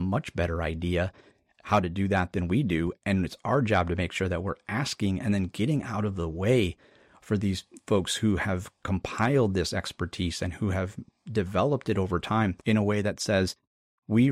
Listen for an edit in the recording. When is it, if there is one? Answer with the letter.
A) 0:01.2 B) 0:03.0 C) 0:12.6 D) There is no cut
C